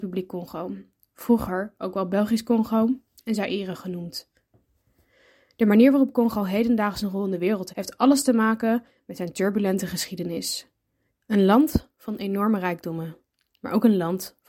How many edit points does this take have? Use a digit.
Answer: 2